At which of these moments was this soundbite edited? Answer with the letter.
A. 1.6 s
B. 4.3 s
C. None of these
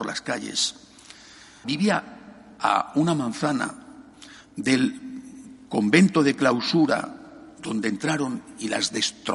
A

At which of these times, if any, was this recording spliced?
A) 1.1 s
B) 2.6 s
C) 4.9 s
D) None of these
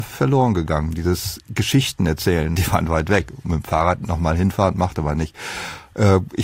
B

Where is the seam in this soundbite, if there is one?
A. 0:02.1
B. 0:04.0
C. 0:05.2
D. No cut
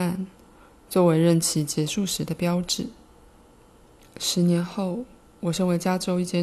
B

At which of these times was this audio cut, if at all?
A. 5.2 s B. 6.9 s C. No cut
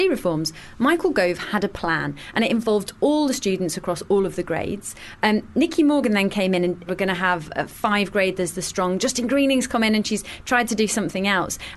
B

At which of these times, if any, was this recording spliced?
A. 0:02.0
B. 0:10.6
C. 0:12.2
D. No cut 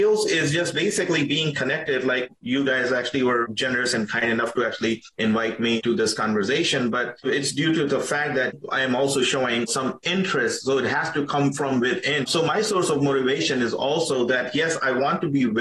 C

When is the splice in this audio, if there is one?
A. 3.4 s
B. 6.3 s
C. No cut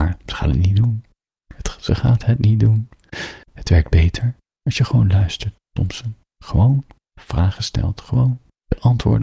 A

